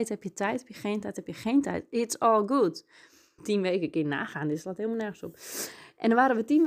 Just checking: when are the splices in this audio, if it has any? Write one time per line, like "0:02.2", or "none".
0:03.4